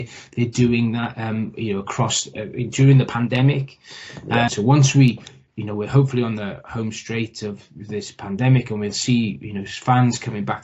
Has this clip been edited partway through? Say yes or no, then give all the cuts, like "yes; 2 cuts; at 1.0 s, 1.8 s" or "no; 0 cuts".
yes; 1 cut; at 4.5 s